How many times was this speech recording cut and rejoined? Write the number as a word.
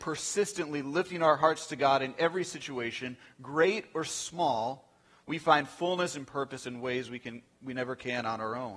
zero